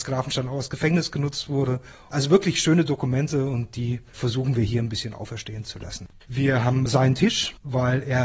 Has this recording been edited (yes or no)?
yes